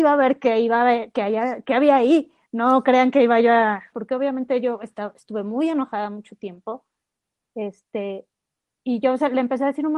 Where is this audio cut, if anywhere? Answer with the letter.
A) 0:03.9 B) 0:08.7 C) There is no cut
A